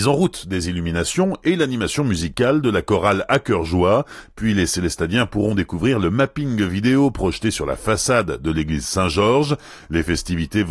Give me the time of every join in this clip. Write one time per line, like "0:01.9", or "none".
none